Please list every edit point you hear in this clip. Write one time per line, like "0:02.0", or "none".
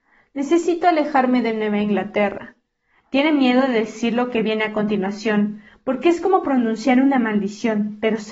none

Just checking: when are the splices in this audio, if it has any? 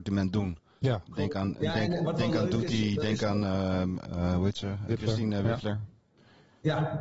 0:04.9

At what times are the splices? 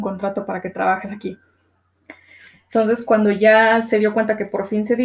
none

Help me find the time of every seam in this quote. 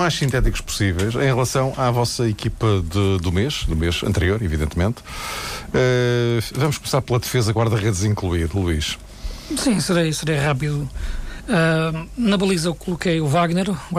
none

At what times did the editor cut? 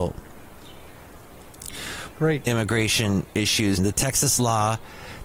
0:02.1
0:03.8

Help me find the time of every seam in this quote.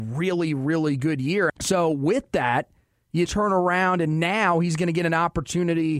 0:01.5
0:03.3

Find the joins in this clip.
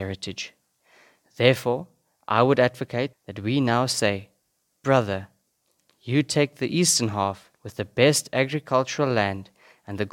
0:03.1
0:07.6

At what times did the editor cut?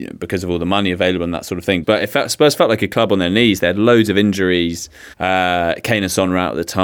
0:01.8
0:05.1

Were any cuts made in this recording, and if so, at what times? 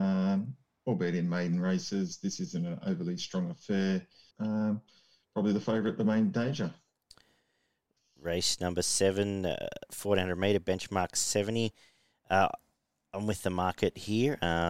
0:04.3

